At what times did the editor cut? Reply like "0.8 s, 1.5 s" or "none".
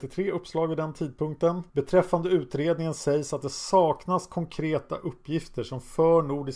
1.7 s